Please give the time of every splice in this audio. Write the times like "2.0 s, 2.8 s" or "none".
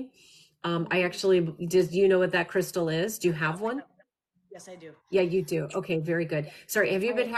5.0 s